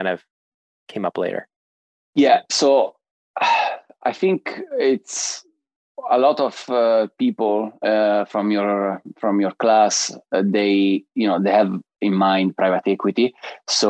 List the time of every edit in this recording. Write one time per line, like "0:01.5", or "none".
none